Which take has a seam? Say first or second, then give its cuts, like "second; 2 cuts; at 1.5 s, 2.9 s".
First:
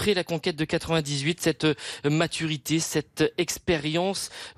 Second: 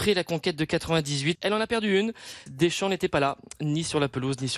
second; 2 cuts; at 1.4 s, 2.5 s